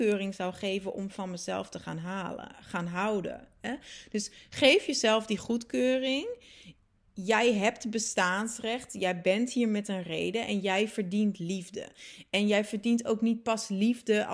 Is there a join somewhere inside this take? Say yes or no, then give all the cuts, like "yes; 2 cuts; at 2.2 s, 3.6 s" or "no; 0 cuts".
no; 0 cuts